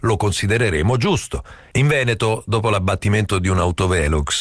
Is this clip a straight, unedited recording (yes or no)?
no